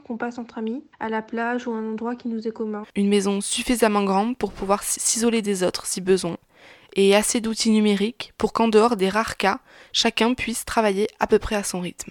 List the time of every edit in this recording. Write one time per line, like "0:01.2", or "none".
0:00.9
0:02.8